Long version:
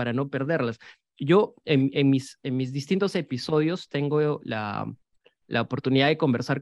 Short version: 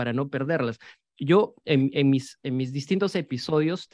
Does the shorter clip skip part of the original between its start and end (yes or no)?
no